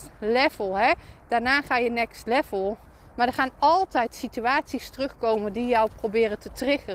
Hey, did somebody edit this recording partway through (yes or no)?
no